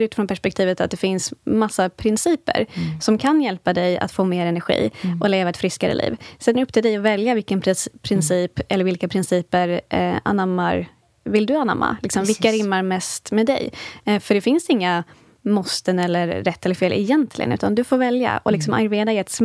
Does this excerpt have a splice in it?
no; 0 cuts

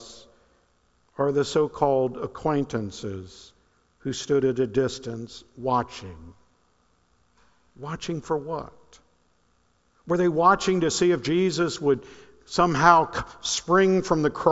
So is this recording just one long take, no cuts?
yes; 0 cuts

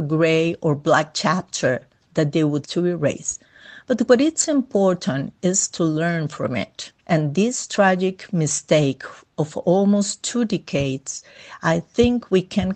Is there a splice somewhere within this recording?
yes; 2 cuts; at 2.6 s, 7.0 s

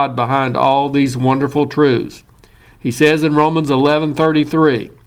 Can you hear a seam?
no; 0 cuts

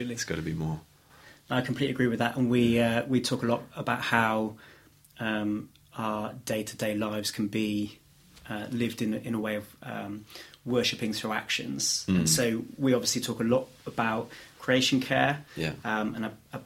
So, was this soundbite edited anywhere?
no; 0 cuts

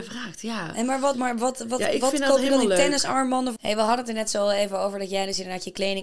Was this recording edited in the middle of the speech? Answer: yes; 2 cuts; at 1.1 s, 3.6 s

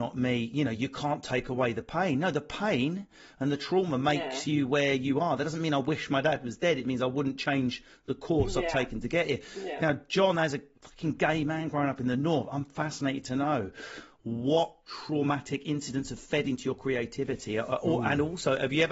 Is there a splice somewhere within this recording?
no; 0 cuts

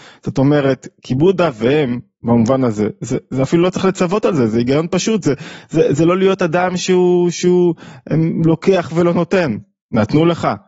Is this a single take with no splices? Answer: yes; 0 cuts

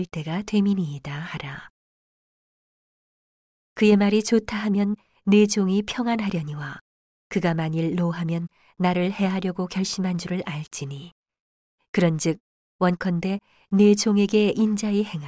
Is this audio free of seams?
yes; 0 cuts

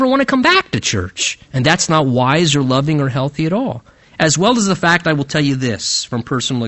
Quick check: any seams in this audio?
yes; 1 cut; at 1.4 s

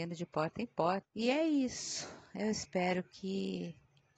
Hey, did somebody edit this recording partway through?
yes; 1 cut; at 1.0 s

